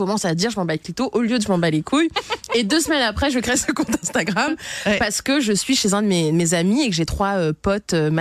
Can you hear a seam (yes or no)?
no